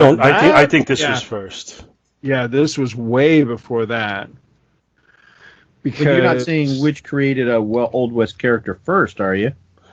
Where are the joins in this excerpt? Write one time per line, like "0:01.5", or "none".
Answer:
none